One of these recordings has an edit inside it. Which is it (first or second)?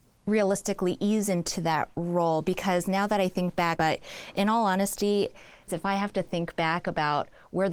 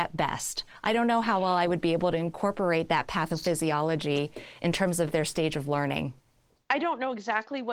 first